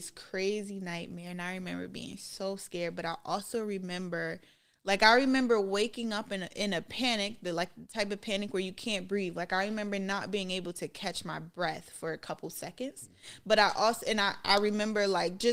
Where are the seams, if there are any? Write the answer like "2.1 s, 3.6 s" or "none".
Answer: none